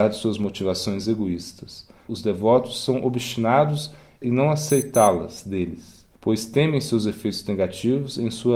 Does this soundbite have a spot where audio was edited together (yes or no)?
yes